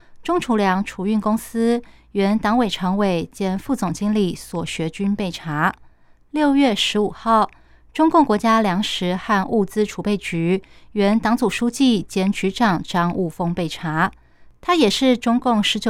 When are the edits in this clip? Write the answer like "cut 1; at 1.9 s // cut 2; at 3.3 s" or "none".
none